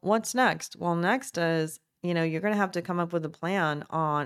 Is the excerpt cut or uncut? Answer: uncut